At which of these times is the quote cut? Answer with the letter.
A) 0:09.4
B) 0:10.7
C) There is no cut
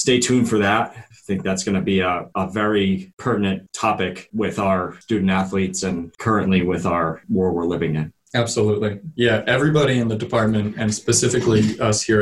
C